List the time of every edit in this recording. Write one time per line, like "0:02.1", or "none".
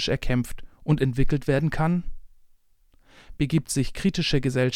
0:03.4

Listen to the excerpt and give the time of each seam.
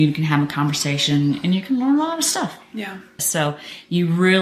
0:03.2

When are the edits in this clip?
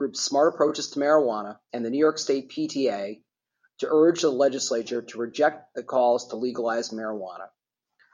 0:01.7

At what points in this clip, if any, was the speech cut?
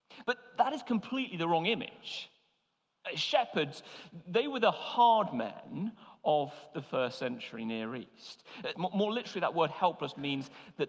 0:08.7

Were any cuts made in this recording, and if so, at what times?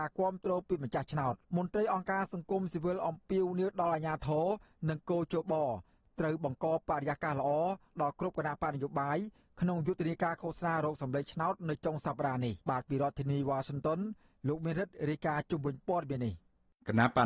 0:01.4
0:12.6

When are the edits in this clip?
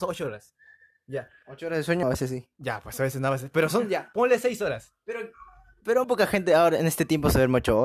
0:02.0
0:06.0

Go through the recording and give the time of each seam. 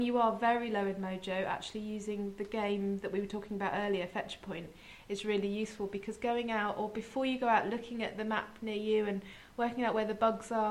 none

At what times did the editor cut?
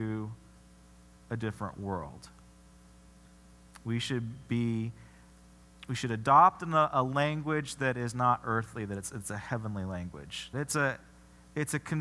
0:10.5

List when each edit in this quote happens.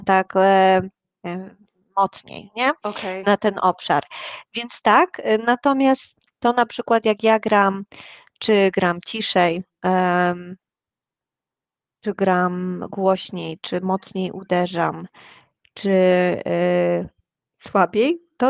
none

